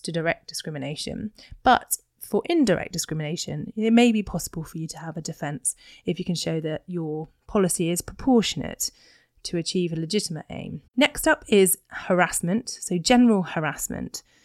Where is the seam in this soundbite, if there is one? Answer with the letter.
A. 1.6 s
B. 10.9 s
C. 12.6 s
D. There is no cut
B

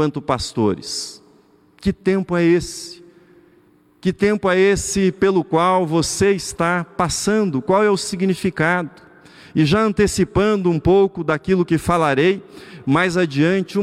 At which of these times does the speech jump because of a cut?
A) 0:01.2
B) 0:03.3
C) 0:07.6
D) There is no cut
D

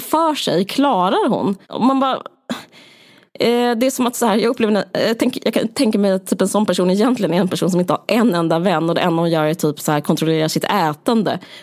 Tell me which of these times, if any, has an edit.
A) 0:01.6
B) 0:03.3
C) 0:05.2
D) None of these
A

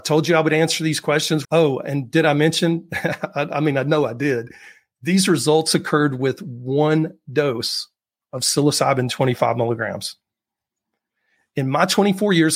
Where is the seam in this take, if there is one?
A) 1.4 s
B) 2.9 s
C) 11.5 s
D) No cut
A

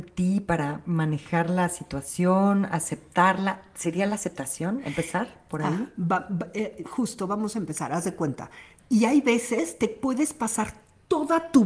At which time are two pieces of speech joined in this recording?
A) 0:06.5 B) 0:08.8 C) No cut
B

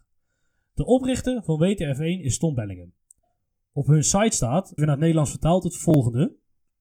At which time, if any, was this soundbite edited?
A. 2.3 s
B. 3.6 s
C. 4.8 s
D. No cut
C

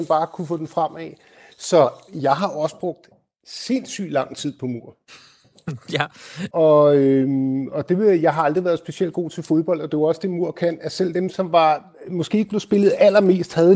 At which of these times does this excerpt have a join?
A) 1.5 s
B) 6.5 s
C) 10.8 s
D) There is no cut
B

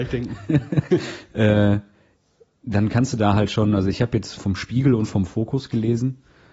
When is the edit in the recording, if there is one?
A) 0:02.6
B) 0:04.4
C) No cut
B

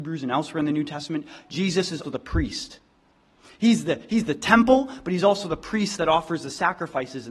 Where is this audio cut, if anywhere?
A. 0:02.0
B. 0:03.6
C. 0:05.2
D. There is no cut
A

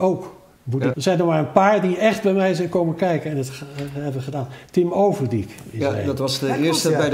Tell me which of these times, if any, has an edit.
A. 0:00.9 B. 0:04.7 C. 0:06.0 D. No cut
A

